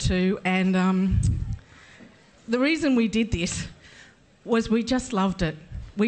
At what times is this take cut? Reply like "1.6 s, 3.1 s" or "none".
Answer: 2.4 s